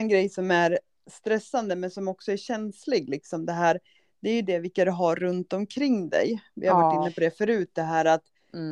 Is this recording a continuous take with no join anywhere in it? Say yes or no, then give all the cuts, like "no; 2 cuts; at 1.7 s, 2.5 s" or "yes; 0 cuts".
yes; 0 cuts